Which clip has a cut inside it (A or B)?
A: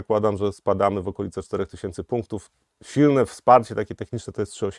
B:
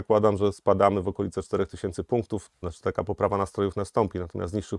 B